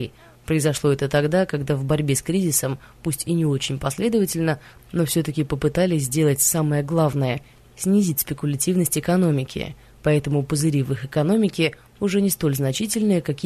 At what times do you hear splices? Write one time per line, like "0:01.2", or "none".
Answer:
none